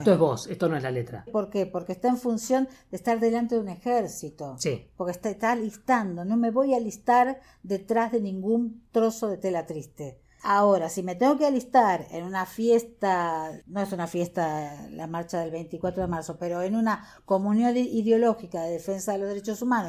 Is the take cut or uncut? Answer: cut